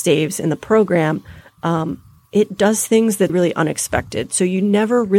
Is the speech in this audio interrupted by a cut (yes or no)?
yes